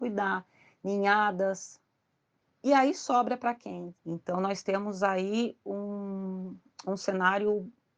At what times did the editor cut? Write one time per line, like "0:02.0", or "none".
0:02.4
0:04.0